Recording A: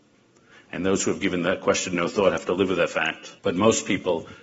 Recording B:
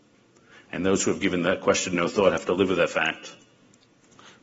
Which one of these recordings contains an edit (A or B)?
A